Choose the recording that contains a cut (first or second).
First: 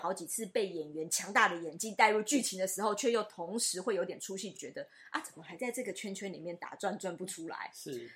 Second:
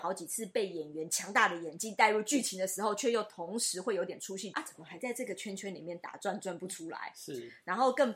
second